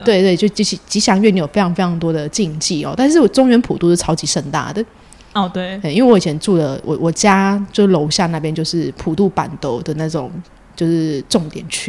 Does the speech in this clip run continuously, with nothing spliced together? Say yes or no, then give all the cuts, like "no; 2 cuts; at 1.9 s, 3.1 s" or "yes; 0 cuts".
yes; 0 cuts